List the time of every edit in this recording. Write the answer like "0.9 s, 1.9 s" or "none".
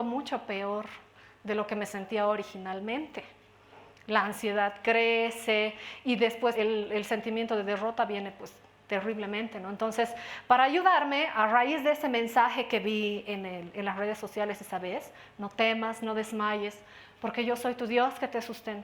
6.5 s